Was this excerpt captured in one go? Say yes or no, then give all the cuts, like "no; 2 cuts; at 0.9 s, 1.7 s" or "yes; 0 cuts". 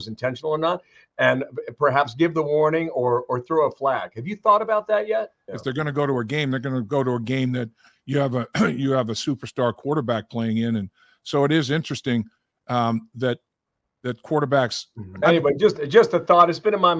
no; 2 cuts; at 5.5 s, 15.2 s